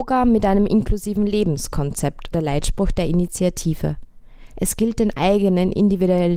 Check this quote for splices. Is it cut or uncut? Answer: cut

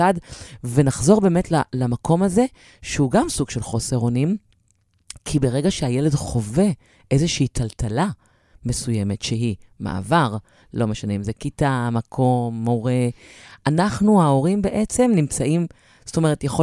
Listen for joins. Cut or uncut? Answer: uncut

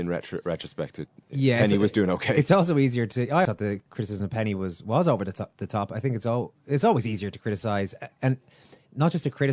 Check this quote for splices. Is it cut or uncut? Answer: cut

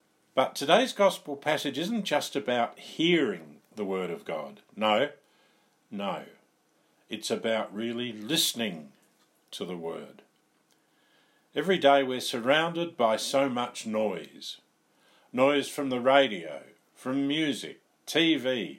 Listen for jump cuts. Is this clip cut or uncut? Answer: uncut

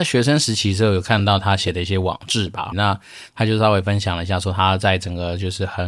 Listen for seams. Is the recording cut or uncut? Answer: cut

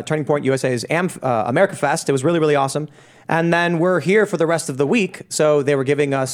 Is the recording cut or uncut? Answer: uncut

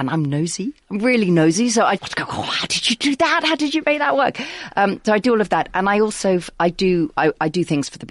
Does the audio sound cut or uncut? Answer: cut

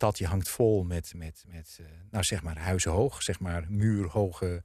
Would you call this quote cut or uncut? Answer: uncut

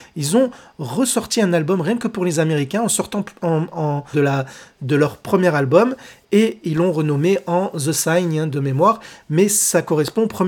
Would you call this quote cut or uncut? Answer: cut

